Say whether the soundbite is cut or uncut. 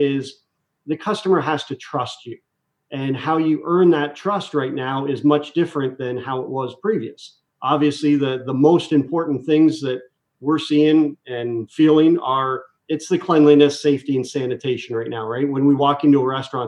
uncut